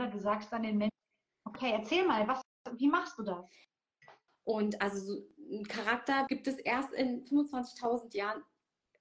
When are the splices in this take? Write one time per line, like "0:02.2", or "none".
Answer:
0:04.3
0:06.3